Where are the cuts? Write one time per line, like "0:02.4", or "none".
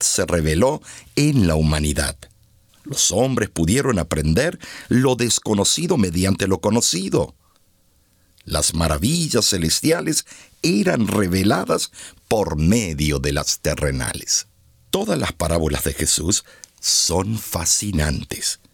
0:02.7

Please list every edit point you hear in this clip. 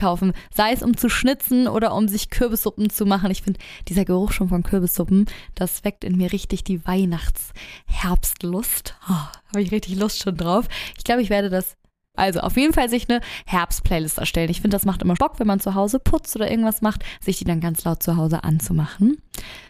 0:12.1
0:15.2

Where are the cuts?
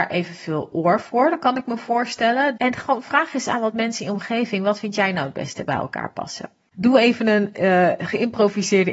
0:02.6
0:06.7

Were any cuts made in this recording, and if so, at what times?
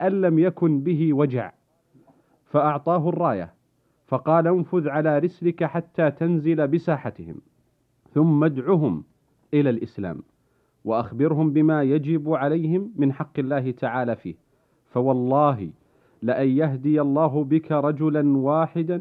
none

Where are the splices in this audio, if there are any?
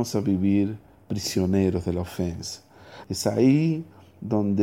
0:03.0

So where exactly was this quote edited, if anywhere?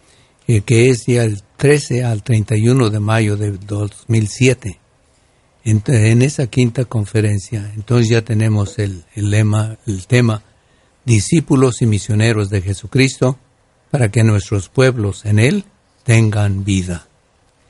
0:09.7

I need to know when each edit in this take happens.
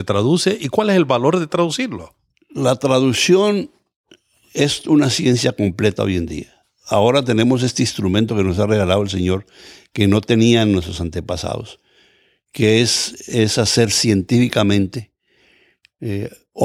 none

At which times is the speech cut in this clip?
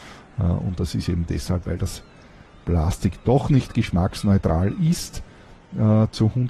none

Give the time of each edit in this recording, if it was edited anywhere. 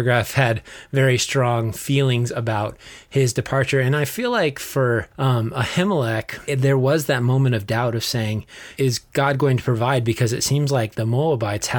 0:05.1

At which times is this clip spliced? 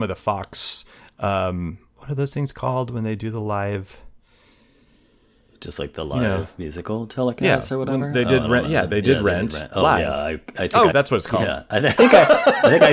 0:10.9
0:12.0

